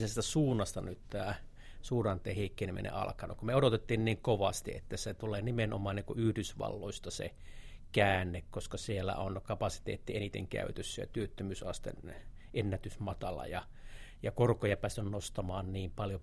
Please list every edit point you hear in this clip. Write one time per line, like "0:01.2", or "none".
none